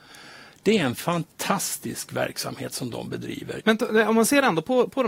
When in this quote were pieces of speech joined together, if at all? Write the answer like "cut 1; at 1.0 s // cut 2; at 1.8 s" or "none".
cut 1; at 3.6 s